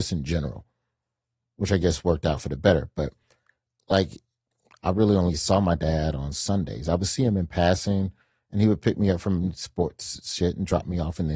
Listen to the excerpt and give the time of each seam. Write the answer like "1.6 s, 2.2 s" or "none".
none